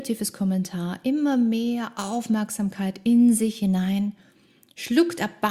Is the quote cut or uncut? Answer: uncut